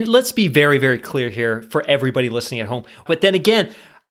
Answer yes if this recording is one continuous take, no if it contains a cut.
no